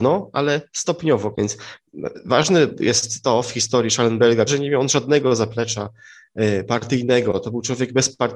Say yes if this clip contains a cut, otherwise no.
yes